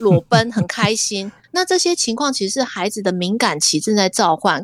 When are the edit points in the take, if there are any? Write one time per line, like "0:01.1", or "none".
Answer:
0:01.4